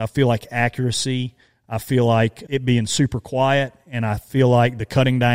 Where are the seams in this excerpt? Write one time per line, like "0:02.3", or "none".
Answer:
0:02.5